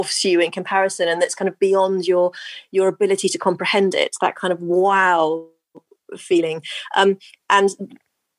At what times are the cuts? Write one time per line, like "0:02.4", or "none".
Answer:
none